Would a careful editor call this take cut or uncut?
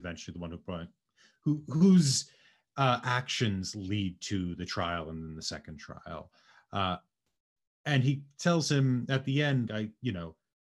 cut